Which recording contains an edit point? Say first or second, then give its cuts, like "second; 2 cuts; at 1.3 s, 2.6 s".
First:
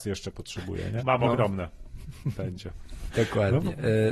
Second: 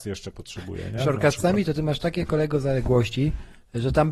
first; 2 cuts; at 1.0 s, 3.1 s